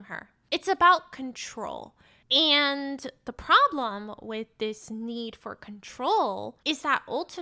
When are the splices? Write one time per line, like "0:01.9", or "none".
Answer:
none